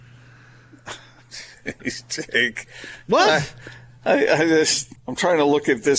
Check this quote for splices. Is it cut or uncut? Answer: cut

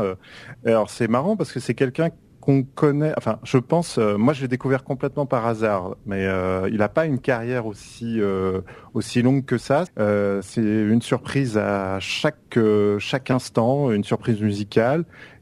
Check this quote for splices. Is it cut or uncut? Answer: cut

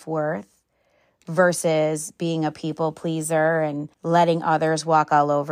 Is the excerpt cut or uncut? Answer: cut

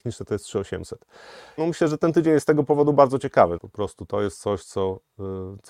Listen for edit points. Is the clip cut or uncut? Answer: cut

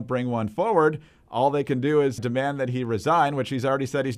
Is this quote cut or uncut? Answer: cut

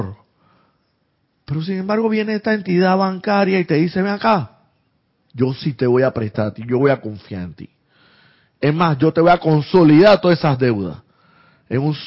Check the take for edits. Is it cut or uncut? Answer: uncut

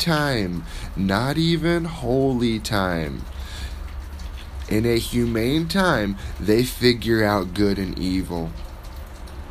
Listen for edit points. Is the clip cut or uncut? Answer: uncut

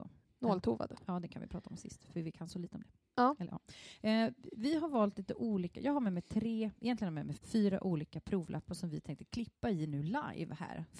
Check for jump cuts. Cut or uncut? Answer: cut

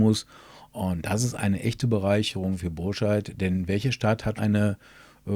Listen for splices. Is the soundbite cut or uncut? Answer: cut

